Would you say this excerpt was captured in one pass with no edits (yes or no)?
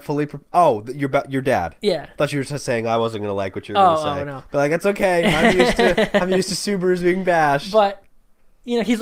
yes